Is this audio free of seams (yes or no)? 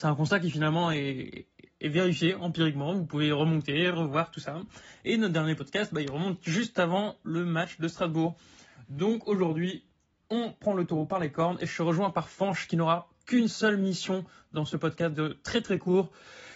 yes